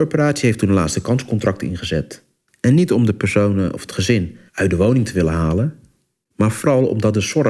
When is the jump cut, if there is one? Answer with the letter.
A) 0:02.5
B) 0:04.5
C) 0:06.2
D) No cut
B